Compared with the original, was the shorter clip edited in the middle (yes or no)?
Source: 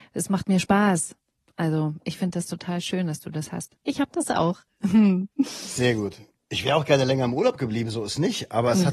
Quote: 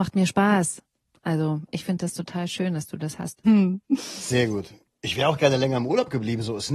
yes